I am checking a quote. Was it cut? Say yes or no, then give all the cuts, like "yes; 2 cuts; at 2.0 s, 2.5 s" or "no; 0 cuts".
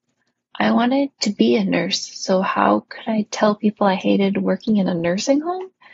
no; 0 cuts